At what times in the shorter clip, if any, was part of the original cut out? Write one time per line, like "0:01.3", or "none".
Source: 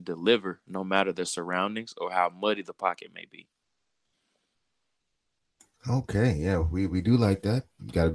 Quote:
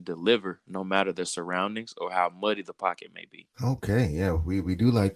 0:03.5